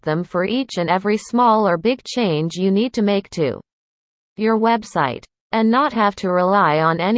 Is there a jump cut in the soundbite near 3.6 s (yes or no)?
no